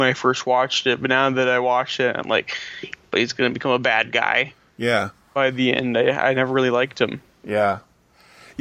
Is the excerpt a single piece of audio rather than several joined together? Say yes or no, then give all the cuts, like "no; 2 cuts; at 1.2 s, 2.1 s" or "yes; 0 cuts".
yes; 0 cuts